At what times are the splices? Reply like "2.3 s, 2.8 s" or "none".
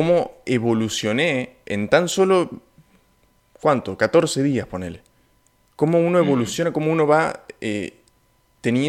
none